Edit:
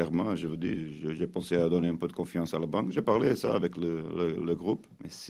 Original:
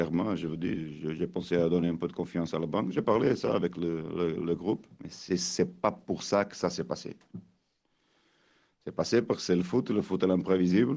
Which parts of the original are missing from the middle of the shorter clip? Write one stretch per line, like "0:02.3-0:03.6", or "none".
none